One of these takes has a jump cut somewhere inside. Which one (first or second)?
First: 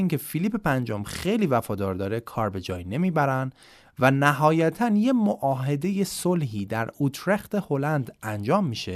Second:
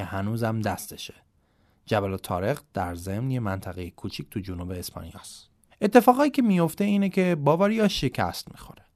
second